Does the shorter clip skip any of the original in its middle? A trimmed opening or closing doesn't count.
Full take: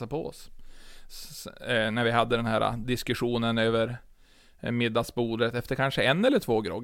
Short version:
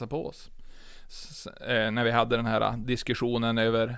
no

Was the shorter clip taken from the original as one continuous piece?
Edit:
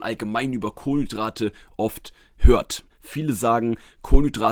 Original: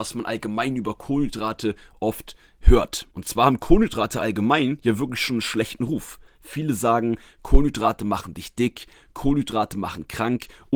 no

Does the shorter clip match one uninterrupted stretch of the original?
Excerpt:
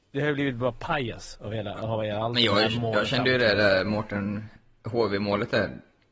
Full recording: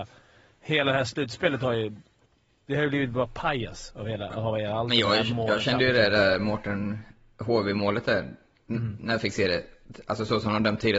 yes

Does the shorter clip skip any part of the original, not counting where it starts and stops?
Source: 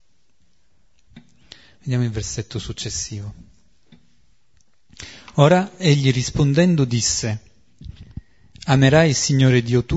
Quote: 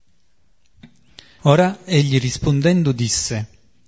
yes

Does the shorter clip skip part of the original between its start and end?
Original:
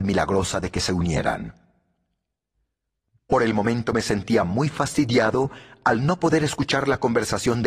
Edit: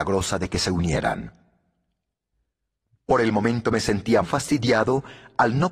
yes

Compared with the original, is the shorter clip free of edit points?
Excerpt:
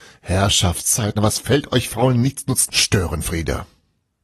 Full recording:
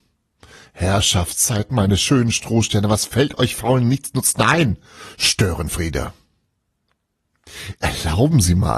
no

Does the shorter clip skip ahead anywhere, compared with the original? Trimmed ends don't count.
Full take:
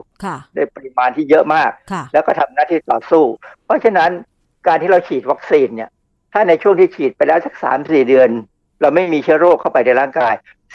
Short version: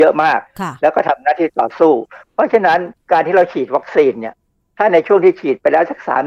yes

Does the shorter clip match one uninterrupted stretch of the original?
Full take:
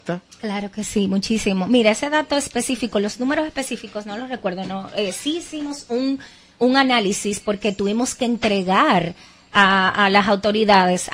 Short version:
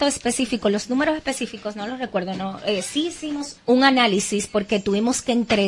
no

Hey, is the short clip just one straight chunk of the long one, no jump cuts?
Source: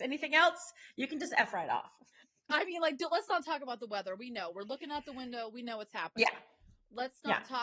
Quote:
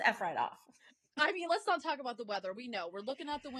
no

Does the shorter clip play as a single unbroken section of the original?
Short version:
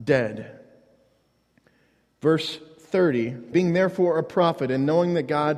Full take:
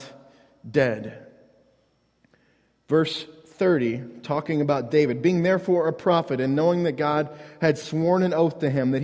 no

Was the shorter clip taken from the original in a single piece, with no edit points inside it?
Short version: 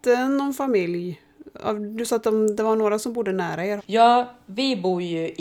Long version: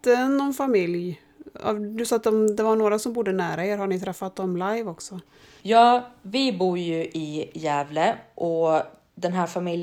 no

